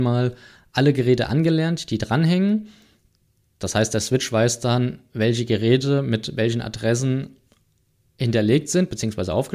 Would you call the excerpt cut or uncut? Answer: uncut